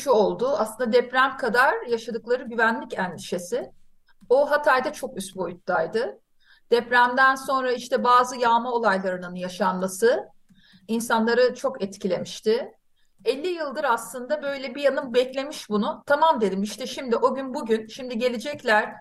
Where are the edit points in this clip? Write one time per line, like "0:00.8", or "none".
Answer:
0:13.1